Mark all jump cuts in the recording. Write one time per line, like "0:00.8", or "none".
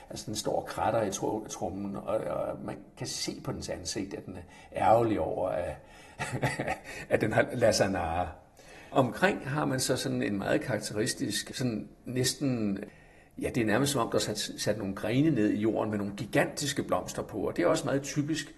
none